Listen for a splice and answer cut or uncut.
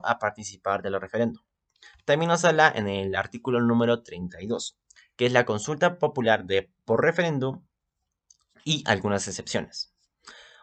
uncut